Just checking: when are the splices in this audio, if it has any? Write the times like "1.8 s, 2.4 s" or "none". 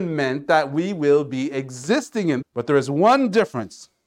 2.4 s